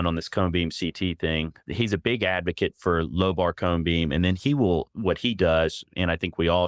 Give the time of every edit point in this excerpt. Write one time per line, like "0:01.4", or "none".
none